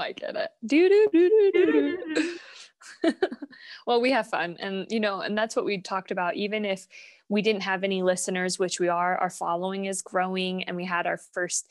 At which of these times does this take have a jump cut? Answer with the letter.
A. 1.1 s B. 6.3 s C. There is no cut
A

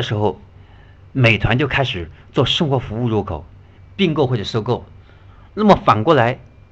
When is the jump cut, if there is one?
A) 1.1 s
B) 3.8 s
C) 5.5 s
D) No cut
B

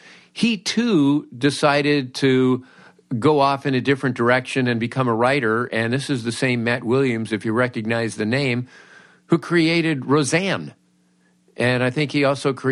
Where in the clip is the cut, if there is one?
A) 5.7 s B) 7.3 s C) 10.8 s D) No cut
D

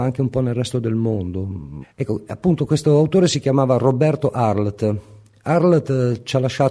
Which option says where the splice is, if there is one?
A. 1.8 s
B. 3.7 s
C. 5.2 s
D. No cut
A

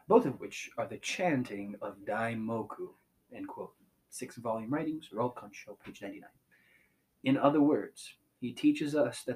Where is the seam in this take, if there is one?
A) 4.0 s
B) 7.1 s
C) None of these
C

